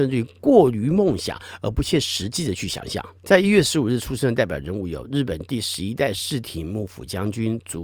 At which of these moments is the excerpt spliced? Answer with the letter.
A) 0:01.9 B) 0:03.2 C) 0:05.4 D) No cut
B